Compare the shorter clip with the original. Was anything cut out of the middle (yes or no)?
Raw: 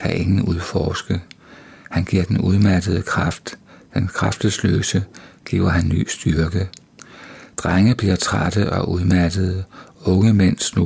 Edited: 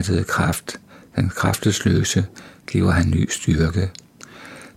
no